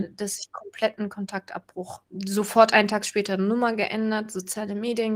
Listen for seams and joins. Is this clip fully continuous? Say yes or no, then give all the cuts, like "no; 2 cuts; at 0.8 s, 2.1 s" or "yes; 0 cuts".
yes; 0 cuts